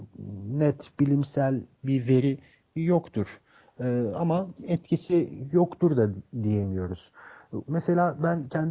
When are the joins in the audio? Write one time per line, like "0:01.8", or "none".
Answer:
0:07.7